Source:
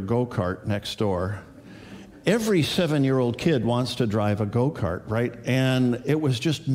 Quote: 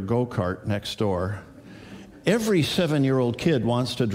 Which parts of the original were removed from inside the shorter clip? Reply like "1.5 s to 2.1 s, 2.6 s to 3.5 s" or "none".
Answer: none